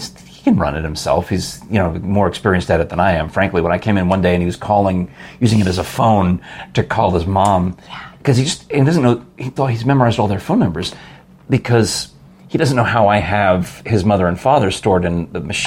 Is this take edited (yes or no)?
yes